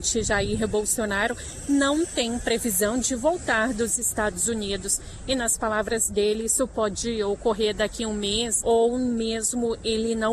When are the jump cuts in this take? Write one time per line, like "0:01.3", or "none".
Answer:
0:08.6